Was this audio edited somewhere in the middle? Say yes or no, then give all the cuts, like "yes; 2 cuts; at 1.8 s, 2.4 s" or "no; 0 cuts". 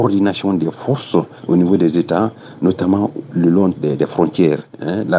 yes; 1 cut; at 3.7 s